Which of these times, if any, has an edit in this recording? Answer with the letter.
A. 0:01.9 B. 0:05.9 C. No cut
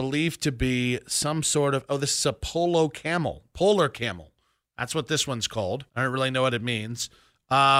B